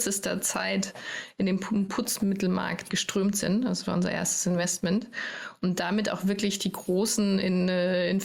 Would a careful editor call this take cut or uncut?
cut